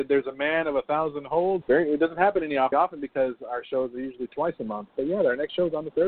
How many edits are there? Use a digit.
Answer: 2